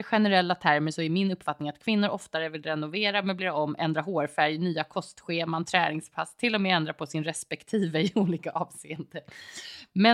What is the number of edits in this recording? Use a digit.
0